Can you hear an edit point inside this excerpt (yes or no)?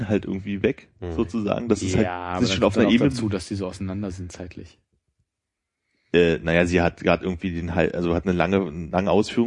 no